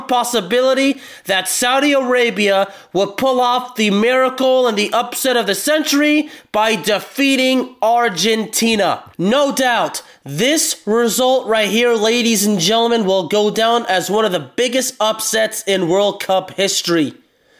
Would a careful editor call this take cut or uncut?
cut